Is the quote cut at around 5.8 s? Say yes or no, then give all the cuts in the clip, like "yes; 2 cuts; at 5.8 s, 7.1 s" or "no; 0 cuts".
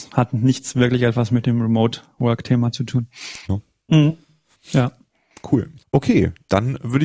yes; 2 cuts; at 3.4 s, 5.8 s